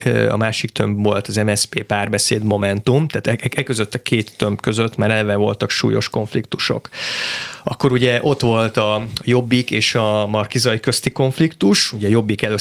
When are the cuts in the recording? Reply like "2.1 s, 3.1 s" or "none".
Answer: none

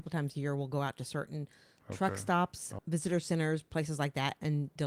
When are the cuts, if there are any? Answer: 2.8 s

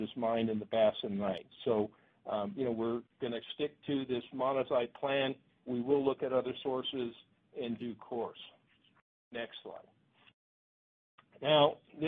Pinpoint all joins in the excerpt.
5.7 s

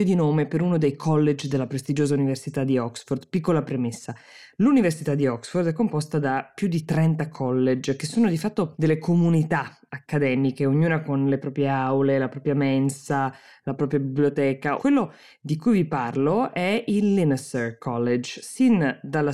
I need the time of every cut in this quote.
14.8 s

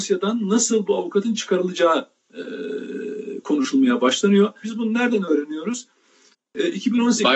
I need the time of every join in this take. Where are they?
4.6 s

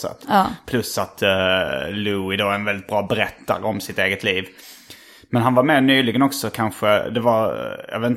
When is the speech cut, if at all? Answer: none

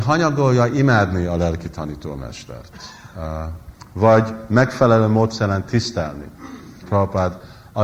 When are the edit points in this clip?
6.8 s

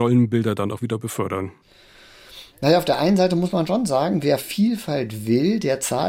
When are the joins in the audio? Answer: none

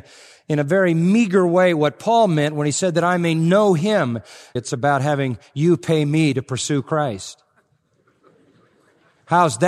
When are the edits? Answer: 4.6 s

